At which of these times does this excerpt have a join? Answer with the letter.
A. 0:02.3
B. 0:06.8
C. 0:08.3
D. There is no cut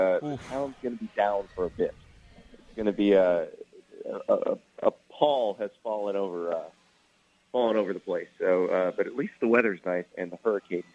D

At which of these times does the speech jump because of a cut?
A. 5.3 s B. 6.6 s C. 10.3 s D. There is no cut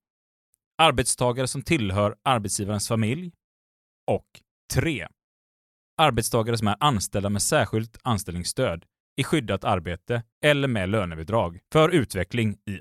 C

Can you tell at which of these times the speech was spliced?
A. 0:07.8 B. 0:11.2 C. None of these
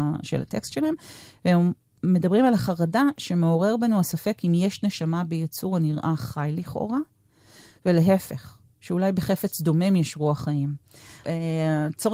B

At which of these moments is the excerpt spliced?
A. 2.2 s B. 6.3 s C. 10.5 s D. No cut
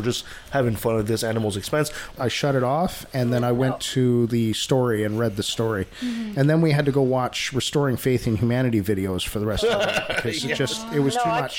A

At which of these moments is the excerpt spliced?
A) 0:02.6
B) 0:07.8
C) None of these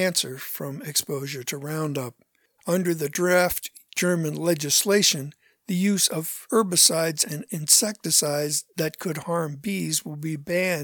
A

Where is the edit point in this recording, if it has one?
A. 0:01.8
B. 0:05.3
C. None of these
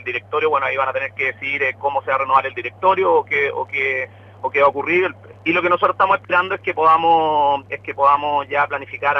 B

